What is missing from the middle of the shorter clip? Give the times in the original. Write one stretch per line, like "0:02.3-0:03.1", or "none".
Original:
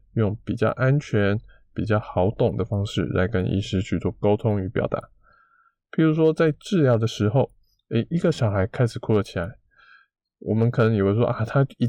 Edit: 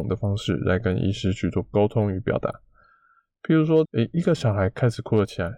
0:06.3-0:07.8

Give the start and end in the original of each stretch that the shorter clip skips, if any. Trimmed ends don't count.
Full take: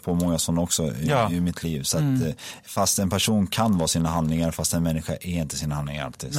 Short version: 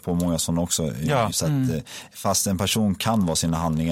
0:01.3-0:01.8

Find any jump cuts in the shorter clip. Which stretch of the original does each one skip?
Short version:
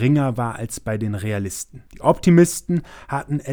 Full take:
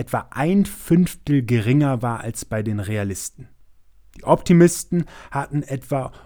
0:03.5-0:04.1

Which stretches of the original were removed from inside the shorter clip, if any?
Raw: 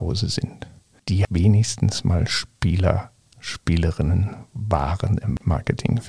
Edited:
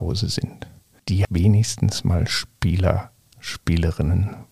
none

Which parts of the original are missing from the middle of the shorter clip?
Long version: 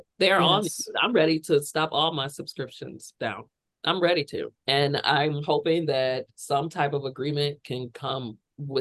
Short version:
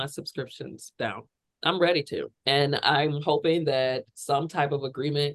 none

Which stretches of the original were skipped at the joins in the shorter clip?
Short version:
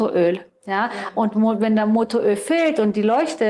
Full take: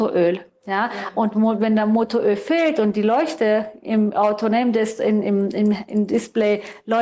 none

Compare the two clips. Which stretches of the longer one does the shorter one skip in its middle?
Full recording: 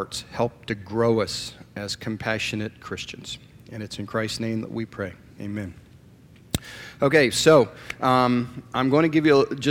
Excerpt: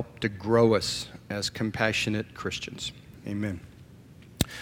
0:03.6-0:05.3

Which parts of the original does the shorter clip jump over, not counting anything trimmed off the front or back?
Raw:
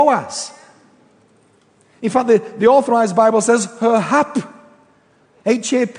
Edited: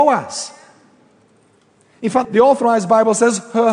0:02.2-0:02.5

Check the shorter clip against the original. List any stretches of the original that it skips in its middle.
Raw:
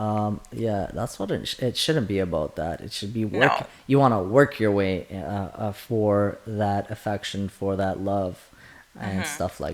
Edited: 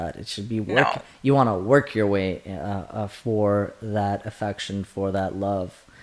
none

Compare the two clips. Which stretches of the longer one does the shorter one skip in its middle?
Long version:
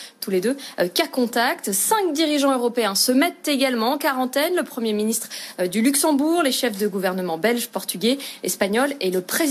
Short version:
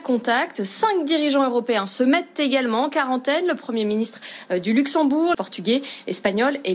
0:06.4-0:07.7

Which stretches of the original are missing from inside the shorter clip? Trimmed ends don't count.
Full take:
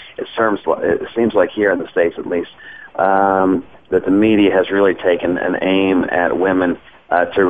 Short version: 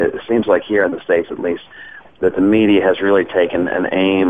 0:02.9-0:03.7

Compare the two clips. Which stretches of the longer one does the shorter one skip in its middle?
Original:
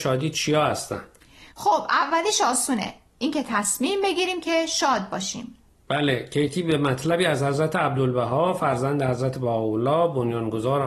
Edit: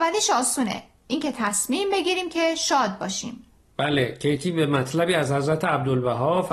none

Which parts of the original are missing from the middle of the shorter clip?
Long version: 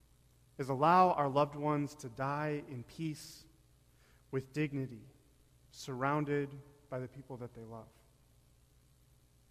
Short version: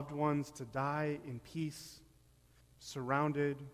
0:04.0-0:05.5

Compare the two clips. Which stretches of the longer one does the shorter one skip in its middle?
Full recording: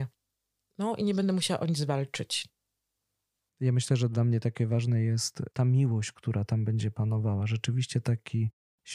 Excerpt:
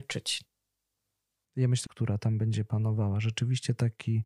0:03.9-0:06.1

